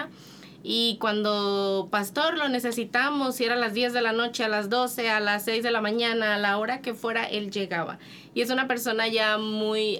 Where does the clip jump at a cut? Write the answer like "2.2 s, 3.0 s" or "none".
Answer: none